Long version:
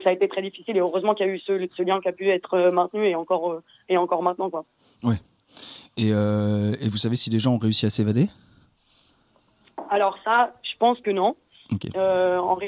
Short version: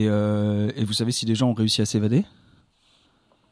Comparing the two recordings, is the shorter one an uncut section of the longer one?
yes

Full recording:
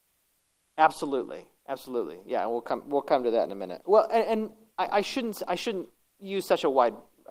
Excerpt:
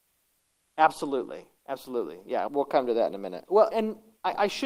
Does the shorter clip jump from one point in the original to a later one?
yes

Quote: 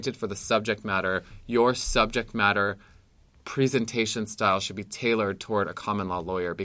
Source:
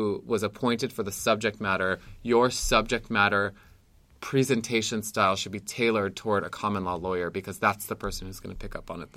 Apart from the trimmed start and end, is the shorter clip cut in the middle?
no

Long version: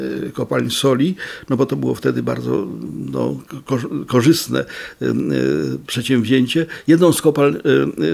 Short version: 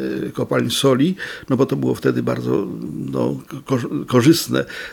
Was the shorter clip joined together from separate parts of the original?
no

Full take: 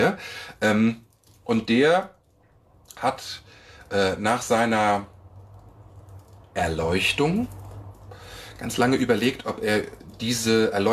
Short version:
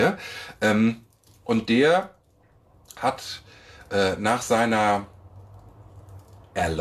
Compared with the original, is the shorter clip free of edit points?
yes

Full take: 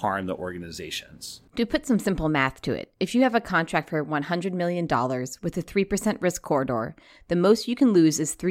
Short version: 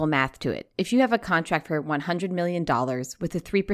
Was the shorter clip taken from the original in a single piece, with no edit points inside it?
yes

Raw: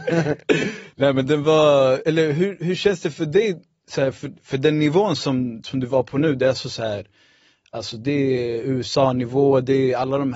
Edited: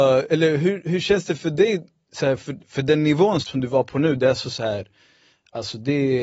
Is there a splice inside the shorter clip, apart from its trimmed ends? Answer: yes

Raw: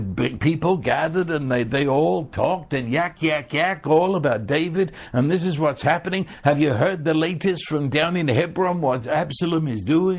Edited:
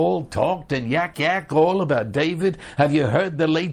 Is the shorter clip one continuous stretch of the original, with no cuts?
no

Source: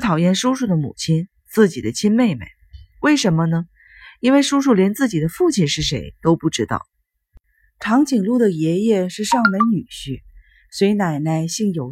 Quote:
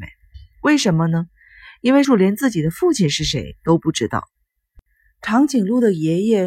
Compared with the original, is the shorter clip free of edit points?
no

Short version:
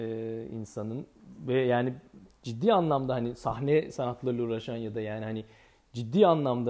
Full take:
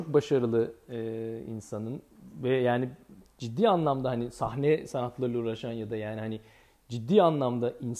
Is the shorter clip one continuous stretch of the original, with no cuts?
yes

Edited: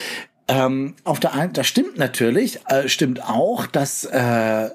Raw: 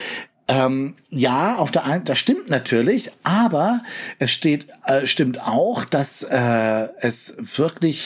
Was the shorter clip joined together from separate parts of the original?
yes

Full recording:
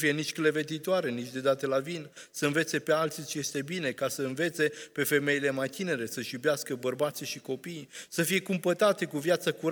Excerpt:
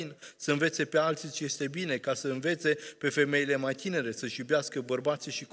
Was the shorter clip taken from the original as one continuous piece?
yes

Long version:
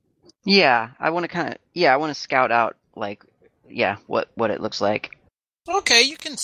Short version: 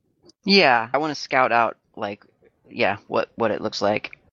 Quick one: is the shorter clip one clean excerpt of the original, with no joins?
no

